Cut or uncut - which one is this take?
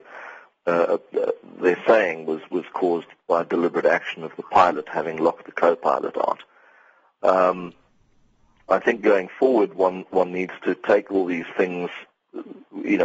uncut